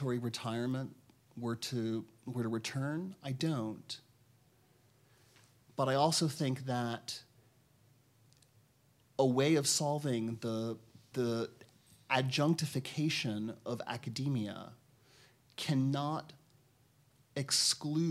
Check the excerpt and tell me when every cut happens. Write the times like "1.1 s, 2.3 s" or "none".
11.1 s